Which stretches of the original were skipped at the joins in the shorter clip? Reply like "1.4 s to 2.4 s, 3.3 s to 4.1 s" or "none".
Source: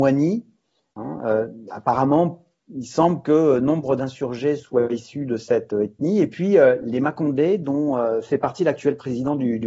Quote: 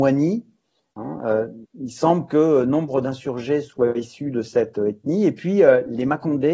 1.6 s to 2.6 s